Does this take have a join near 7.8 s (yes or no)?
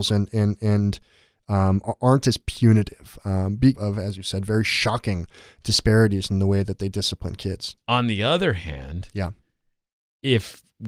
no